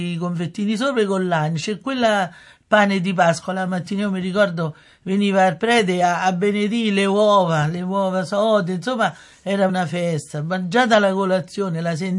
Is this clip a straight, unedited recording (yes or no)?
no